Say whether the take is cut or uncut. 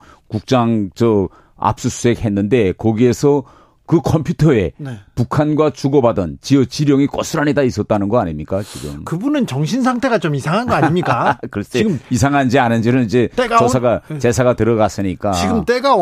uncut